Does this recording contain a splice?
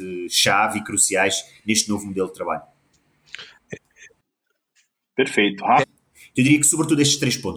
yes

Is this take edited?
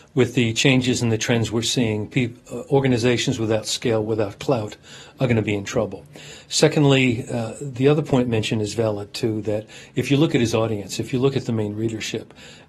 no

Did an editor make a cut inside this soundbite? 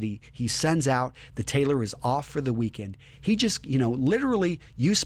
no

